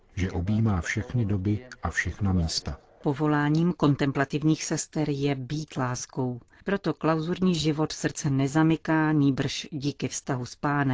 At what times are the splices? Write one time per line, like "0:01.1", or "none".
0:03.0
0:06.6

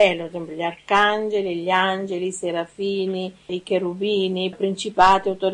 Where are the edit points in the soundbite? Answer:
0:03.5
0:04.5

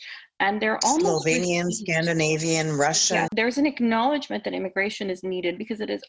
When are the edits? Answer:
0:03.3

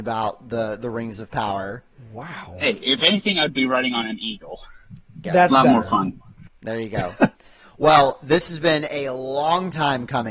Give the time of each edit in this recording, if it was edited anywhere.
0:05.2

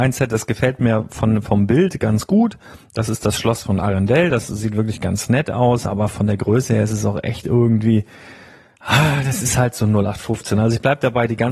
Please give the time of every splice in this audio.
none

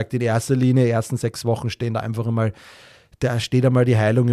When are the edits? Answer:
none

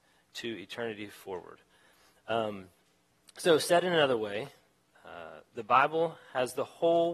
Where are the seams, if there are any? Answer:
none

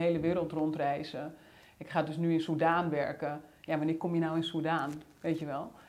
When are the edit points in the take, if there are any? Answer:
none

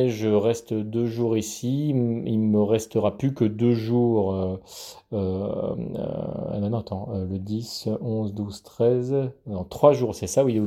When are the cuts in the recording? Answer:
none

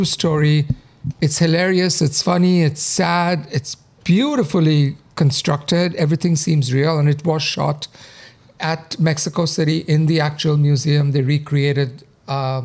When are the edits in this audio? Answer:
none

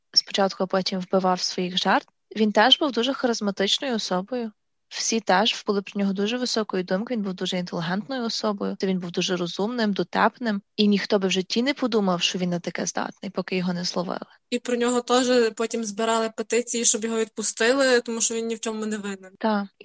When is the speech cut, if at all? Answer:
0:08.8

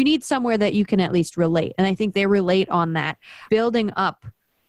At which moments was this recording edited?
0:03.5

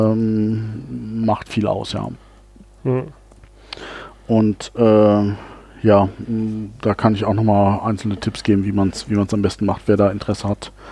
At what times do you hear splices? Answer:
none

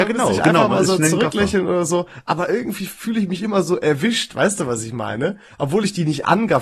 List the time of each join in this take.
none

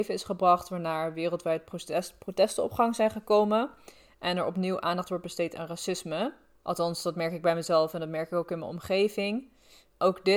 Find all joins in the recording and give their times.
0:06.6

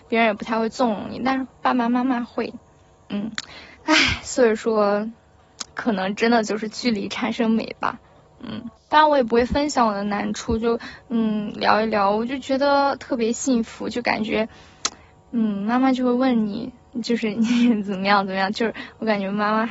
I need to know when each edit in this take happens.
0:03.7
0:08.9

